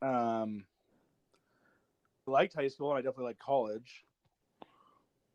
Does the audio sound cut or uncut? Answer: cut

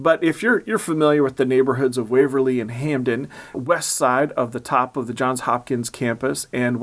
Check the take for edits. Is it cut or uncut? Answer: cut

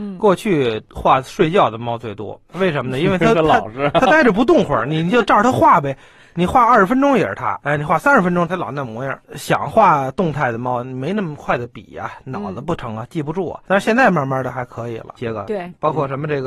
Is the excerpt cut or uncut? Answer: cut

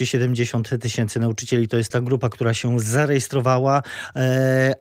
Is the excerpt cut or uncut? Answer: cut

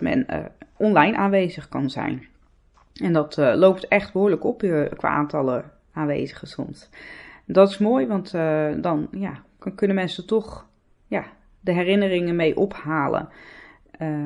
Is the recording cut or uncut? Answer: uncut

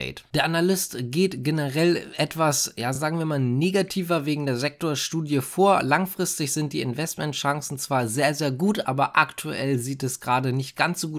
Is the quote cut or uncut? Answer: uncut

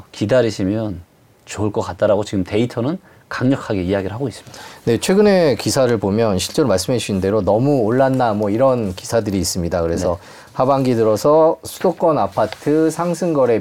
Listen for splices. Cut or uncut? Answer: uncut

